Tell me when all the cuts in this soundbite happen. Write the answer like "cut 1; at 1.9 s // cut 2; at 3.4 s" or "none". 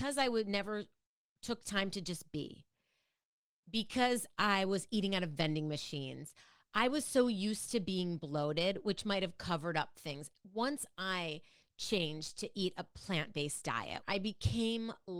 cut 1; at 14.0 s